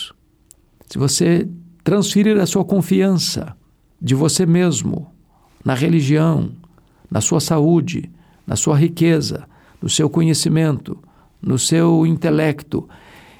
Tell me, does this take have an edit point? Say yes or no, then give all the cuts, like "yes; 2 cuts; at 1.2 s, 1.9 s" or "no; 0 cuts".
no; 0 cuts